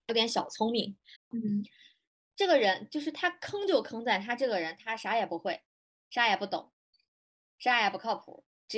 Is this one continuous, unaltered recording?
no; 1 cut; at 1.2 s

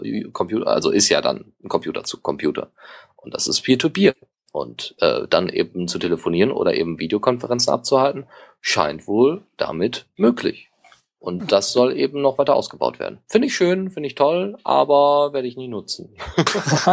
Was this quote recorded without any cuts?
yes; 0 cuts

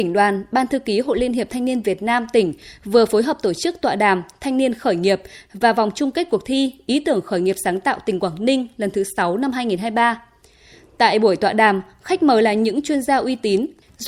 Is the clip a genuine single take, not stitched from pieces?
yes; 0 cuts

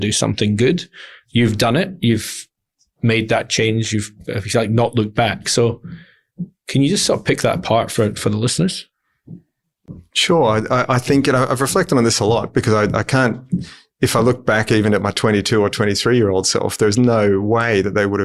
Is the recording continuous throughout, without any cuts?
yes; 0 cuts

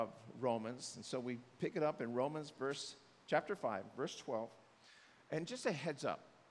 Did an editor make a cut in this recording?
no; 0 cuts

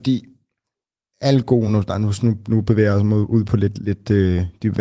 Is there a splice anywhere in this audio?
no; 0 cuts

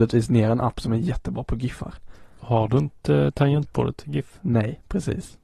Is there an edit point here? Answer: no; 0 cuts

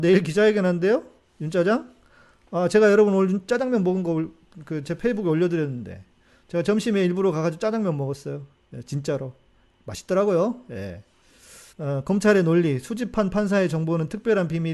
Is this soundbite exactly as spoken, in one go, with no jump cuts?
no; 1 cut; at 11.7 s

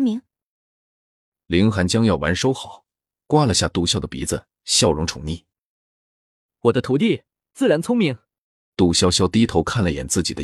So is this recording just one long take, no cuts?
no; 2 cuts; at 3.9 s, 8.7 s

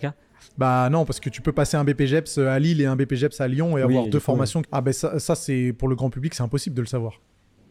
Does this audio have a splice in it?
yes; 1 cut; at 4.6 s

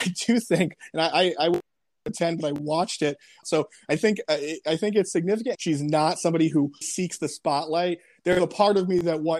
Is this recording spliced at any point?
yes; 3 cuts; at 3.4 s, 5.5 s, 6.8 s

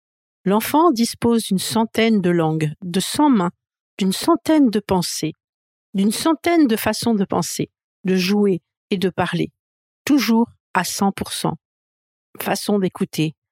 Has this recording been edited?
no; 0 cuts

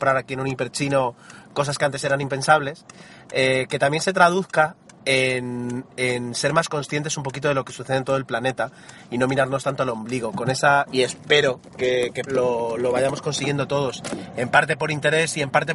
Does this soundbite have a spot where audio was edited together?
yes; 2 cuts; at 10.9 s, 12.3 s

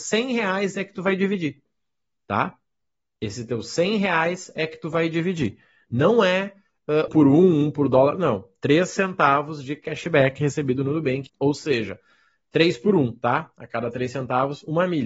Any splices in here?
yes; 2 cuts; at 7.1 s, 11.3 s

